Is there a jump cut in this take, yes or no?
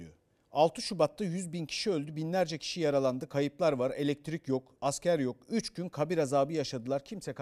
yes